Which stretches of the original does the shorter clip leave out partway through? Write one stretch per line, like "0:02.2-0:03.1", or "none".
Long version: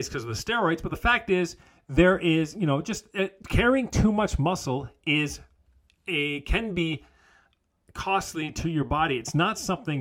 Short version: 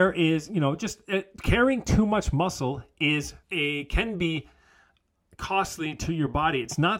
0:05.5-0:06.0